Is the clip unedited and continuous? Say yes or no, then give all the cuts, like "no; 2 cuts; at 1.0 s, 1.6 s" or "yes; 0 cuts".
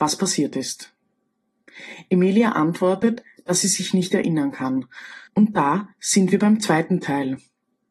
no; 1 cut; at 5.3 s